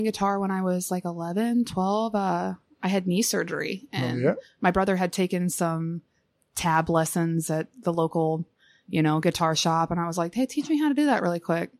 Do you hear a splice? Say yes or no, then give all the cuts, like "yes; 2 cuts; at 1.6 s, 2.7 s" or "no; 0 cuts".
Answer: no; 0 cuts